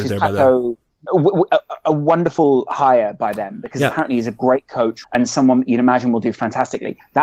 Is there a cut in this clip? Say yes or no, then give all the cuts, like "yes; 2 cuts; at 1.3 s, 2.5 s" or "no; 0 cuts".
yes; 2 cuts; at 1.1 s, 5.0 s